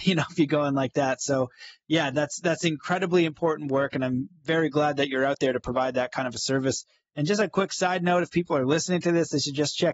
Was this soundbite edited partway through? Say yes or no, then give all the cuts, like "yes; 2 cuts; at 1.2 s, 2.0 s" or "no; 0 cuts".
no; 0 cuts